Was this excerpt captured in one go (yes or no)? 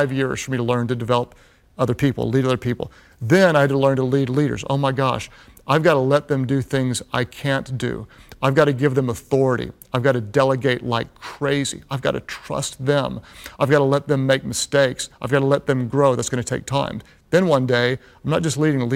yes